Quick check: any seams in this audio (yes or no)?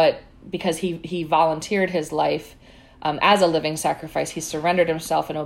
no